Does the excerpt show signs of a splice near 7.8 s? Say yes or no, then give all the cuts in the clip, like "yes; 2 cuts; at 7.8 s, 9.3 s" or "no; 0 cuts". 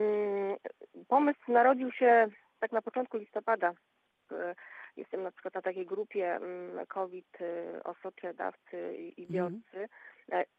no; 1 cut; at 4.3 s